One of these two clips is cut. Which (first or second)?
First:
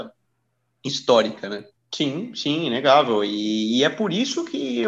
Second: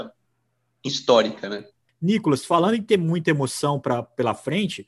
first